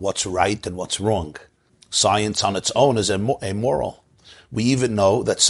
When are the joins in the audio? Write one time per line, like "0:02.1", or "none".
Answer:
0:01.7